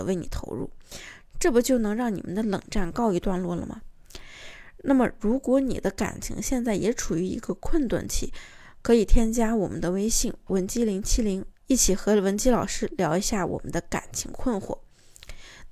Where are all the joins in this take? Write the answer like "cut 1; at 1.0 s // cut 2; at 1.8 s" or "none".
cut 1; at 11.5 s